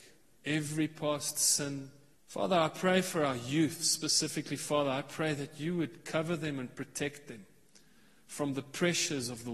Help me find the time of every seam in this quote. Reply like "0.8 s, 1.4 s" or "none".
2.1 s